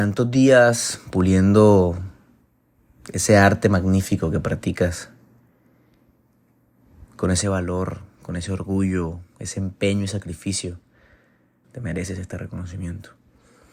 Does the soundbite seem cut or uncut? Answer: cut